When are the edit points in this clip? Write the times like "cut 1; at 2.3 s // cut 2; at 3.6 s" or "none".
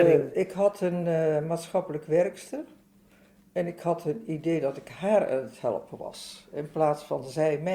none